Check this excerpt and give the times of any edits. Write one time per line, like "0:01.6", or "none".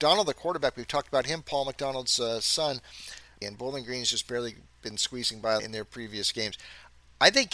0:03.4
0:05.6